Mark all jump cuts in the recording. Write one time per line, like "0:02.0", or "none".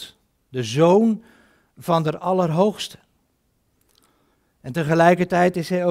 none